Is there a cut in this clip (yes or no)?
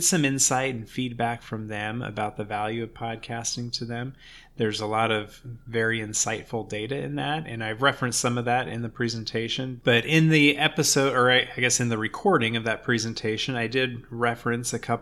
yes